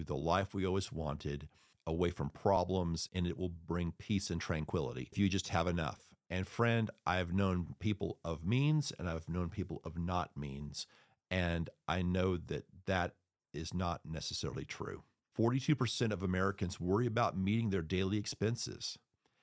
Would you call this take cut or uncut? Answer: uncut